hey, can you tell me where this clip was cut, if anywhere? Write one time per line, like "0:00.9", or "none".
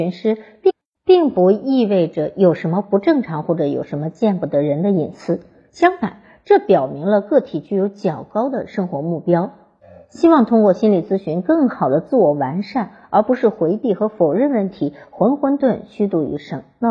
0:15.6

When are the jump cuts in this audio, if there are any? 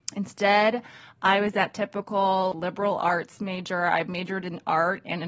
0:02.5

